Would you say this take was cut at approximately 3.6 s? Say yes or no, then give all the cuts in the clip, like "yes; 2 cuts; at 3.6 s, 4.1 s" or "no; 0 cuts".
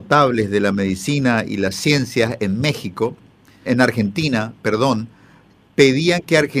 yes; 1 cut; at 3.6 s